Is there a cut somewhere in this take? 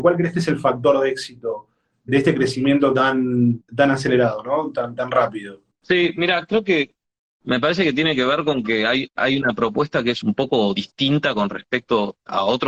no; 0 cuts

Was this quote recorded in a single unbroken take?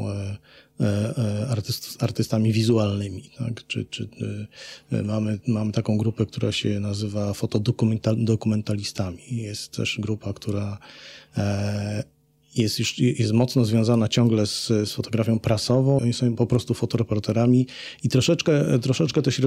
no; 1 cut; at 16.0 s

